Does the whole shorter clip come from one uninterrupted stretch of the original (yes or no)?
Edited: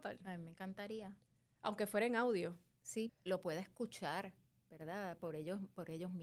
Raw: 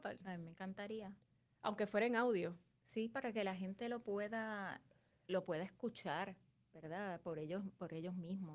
no